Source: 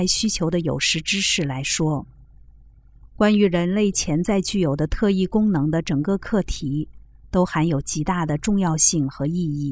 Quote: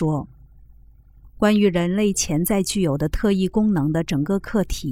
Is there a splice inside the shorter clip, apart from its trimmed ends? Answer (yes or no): no